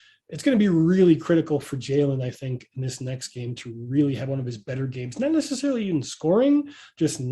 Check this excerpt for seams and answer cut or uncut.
uncut